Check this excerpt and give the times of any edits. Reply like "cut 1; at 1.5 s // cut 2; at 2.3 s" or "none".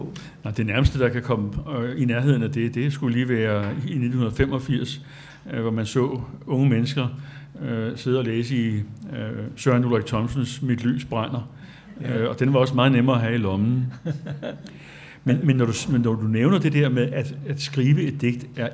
none